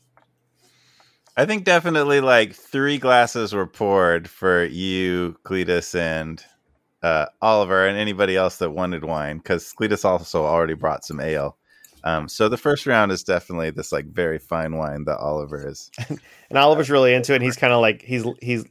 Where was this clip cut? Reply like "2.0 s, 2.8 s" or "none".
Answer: none

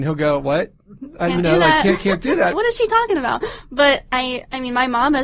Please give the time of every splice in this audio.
2.5 s

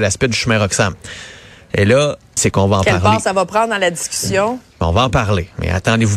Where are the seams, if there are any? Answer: 2.4 s

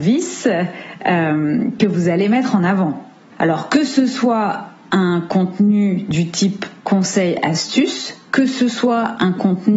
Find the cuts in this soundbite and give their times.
3.3 s

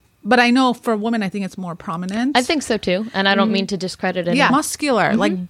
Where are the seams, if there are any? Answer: 4.5 s

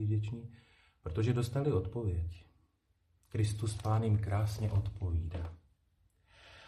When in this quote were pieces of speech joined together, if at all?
none

